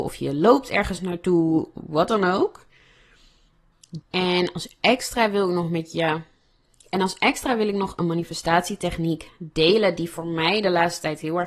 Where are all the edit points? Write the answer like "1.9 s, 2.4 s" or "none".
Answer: 4.0 s